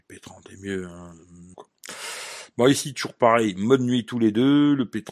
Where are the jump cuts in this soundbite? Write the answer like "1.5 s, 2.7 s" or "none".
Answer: 1.5 s